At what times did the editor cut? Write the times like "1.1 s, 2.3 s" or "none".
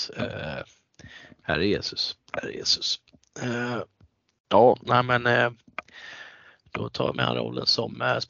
none